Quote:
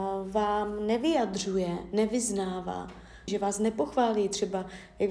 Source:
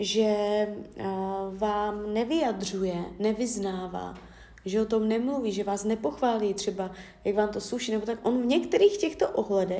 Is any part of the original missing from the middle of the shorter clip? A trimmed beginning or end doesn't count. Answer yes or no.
yes